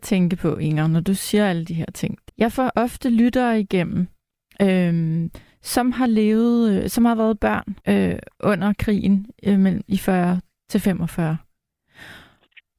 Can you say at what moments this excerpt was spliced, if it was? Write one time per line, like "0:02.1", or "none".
0:02.3
0:07.8